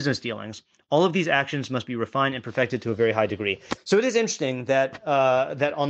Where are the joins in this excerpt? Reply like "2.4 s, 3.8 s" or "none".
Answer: 3.8 s